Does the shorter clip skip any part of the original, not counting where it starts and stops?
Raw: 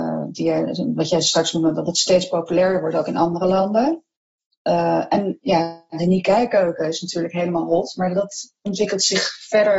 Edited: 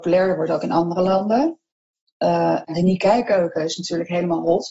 yes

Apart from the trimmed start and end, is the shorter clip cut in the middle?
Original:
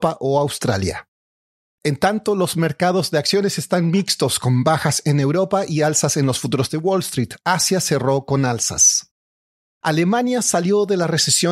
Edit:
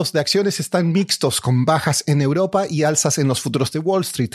no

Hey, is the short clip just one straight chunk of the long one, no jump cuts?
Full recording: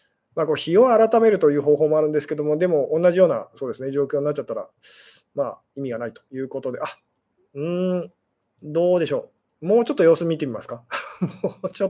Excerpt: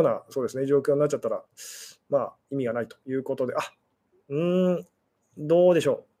yes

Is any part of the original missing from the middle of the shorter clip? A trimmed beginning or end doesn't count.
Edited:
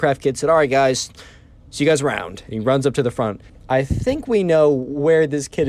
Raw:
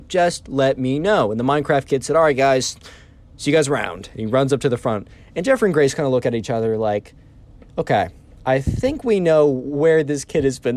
yes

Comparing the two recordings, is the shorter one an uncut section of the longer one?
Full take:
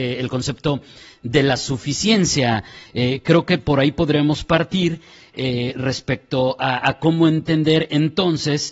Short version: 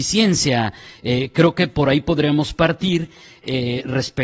yes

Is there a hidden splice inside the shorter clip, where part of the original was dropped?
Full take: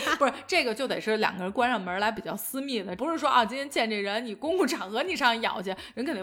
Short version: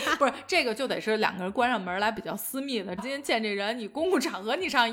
yes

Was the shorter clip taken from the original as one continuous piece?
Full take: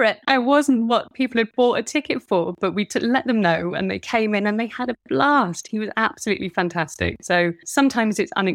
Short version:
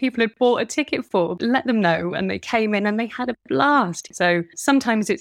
no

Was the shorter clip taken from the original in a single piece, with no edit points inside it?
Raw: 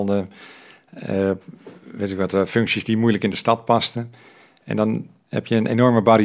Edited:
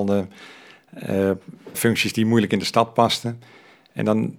no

